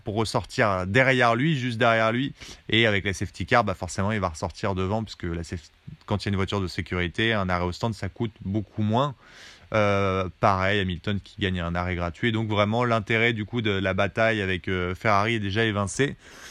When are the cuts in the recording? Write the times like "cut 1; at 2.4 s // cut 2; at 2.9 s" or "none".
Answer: none